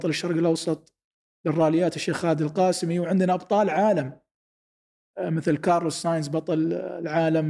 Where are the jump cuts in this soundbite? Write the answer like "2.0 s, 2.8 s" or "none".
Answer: none